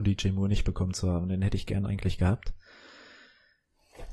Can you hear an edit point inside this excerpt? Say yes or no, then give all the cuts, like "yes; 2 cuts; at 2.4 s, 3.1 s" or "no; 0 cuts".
no; 0 cuts